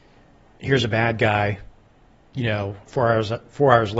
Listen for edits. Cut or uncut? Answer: cut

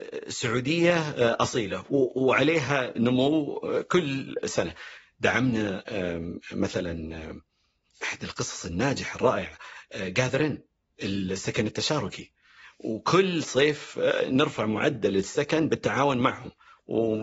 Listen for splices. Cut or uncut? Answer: uncut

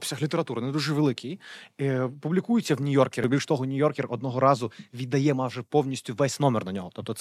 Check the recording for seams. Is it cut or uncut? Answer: uncut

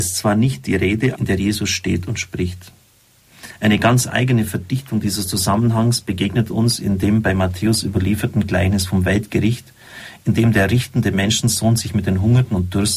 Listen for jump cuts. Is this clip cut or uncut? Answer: cut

